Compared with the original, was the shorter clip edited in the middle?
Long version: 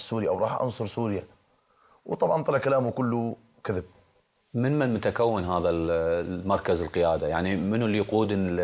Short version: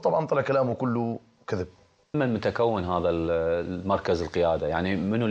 yes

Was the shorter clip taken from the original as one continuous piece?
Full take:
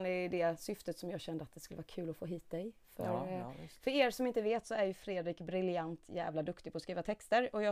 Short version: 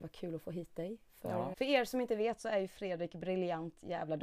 no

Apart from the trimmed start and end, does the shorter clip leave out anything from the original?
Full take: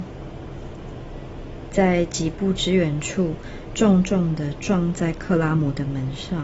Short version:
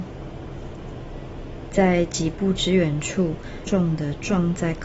yes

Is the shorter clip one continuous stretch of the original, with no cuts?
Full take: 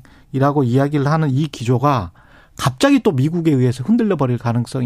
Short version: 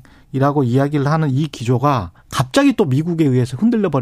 no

